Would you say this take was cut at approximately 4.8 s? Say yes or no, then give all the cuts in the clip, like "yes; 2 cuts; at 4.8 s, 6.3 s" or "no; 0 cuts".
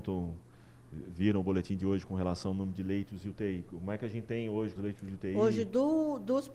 yes; 1 cut; at 4.8 s